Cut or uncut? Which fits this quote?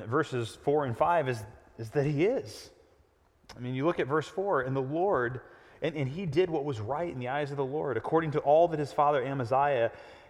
uncut